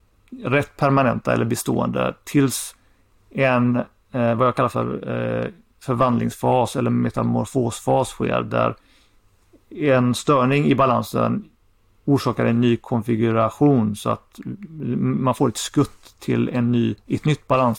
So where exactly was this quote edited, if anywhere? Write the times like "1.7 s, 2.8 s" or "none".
none